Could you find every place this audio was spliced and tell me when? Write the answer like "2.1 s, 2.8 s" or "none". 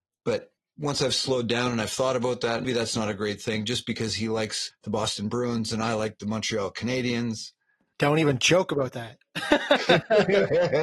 2.6 s